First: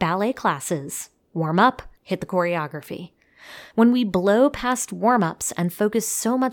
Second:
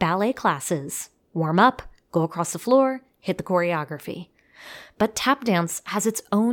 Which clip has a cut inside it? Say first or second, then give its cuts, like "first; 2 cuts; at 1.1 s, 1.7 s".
first; 2 cuts; at 2.0 s, 3.7 s